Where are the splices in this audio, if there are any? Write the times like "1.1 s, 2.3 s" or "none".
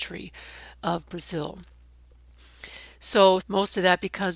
3.4 s